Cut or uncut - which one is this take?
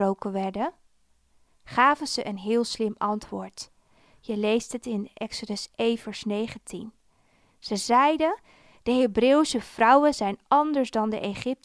uncut